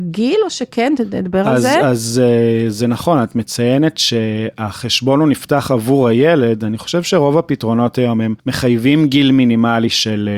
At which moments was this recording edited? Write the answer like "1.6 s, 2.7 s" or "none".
8.4 s